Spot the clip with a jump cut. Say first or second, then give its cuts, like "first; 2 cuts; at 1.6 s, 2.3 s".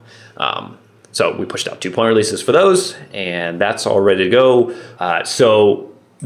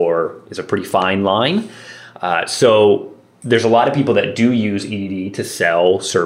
first; 1 cut; at 5.0 s